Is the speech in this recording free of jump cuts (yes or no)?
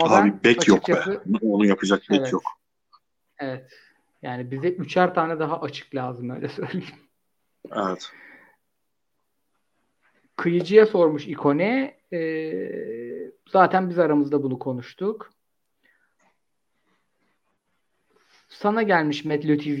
yes